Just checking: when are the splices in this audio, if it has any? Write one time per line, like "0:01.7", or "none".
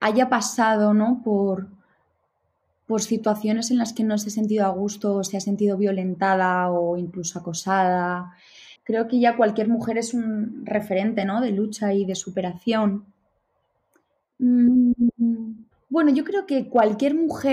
0:08.8
0:14.2